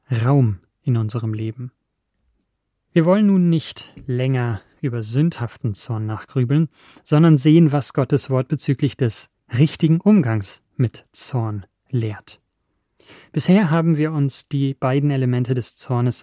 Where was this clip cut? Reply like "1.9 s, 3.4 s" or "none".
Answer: 2.9 s